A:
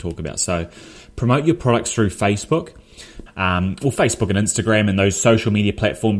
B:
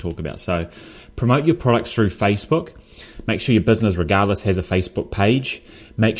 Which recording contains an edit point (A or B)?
A